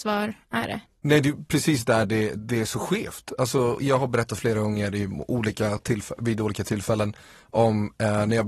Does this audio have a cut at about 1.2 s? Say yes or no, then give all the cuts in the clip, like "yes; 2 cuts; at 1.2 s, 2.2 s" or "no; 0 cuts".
no; 1 cut; at 3.8 s